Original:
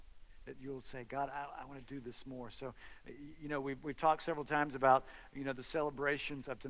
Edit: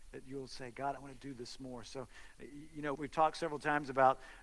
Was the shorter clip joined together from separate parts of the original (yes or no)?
yes